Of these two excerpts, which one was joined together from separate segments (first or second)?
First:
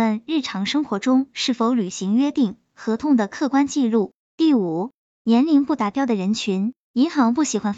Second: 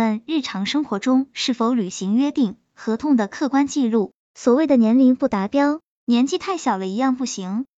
second